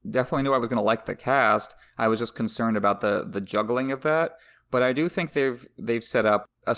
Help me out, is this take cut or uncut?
uncut